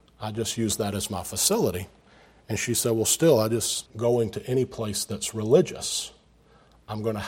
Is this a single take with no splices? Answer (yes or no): no